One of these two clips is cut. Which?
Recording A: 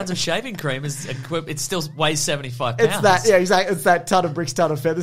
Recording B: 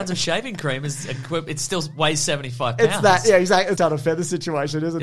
B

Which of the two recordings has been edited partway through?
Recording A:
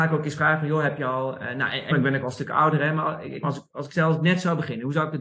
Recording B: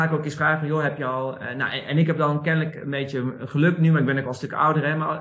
A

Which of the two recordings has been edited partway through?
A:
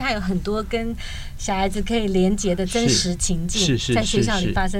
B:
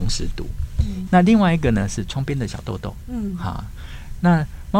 B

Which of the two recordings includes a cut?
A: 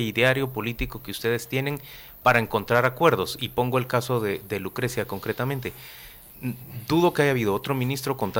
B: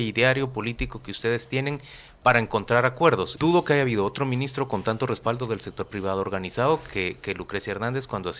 B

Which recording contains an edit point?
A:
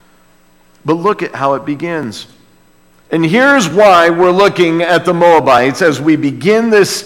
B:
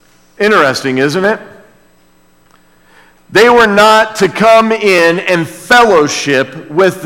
A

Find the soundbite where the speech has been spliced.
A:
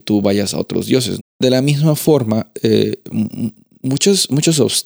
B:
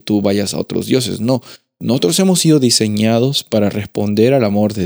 A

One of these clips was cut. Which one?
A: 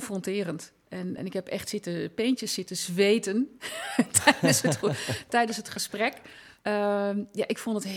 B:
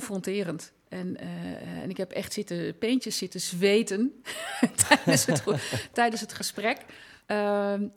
A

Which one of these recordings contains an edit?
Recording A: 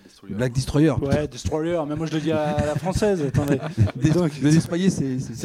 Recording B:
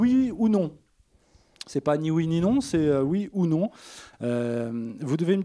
B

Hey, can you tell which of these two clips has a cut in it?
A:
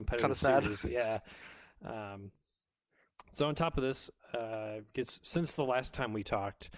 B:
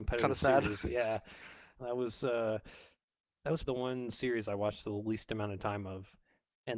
B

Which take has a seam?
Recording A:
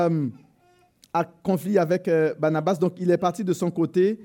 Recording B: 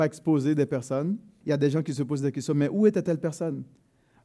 B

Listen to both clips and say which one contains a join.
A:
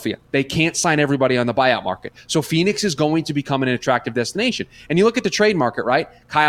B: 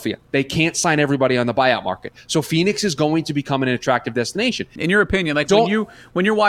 B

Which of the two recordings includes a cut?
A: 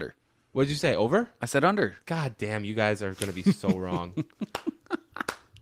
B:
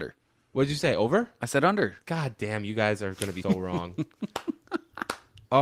B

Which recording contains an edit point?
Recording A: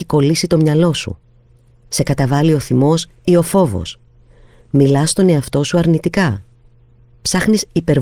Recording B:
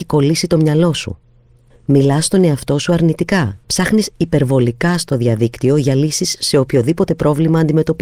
B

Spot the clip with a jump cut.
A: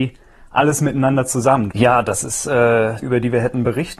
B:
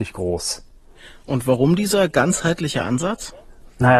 A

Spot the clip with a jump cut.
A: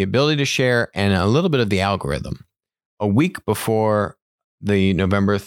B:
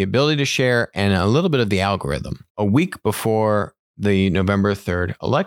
B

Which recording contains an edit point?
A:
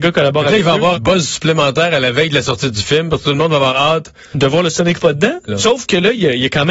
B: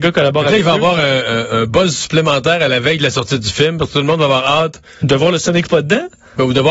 A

